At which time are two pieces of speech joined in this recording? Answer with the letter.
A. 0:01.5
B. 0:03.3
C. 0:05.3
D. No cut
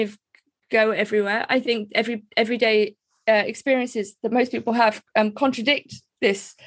D